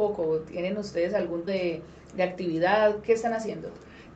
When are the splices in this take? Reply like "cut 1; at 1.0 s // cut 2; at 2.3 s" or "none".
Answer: cut 1; at 1.5 s